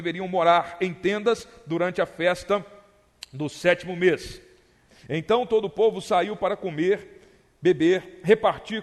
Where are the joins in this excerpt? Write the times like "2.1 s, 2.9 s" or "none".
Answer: 4.9 s